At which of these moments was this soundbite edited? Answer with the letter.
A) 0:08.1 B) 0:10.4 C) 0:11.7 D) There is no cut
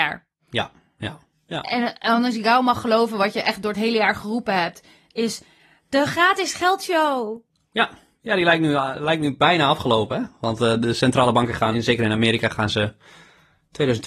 C